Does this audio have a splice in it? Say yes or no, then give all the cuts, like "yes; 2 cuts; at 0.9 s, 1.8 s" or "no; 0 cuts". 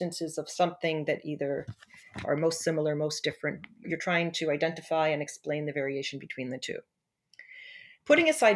yes; 1 cut; at 3.8 s